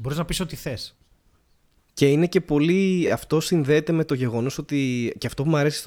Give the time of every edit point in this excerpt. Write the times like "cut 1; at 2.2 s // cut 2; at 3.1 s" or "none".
none

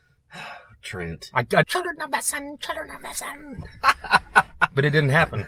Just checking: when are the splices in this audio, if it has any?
cut 1; at 1.6 s

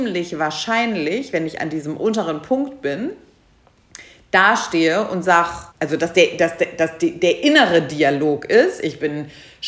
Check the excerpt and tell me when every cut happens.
cut 1; at 5.7 s

